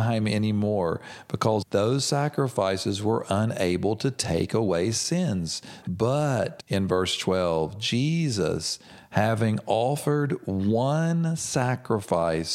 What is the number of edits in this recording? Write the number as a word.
one